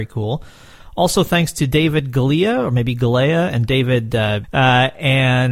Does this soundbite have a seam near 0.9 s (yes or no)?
no